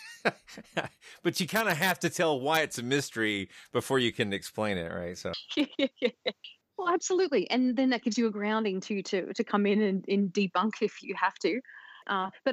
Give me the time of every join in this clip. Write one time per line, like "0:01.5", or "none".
0:11.0

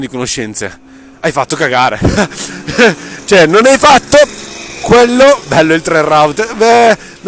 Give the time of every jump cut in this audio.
none

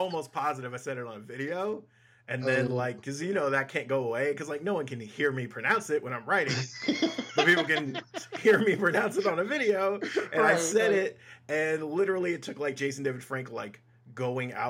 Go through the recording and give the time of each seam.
none

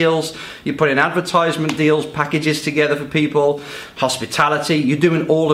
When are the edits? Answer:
none

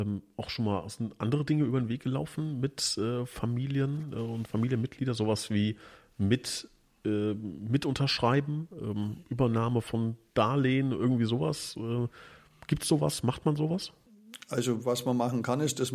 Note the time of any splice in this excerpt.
none

